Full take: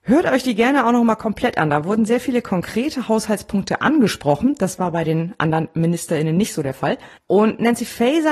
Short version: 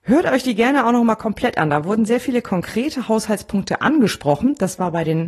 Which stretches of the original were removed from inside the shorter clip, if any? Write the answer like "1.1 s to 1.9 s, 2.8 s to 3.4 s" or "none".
none